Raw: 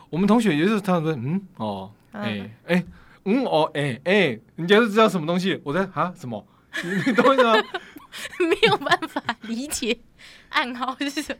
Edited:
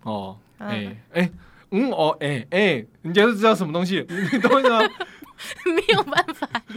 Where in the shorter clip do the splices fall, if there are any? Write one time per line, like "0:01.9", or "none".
0:04.1